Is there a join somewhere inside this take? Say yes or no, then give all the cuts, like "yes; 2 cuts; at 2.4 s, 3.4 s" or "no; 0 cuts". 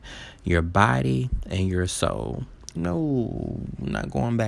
yes; 1 cut; at 2.8 s